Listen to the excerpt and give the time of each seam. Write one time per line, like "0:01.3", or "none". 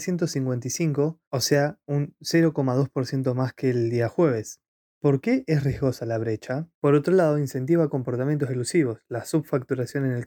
0:04.8
0:06.7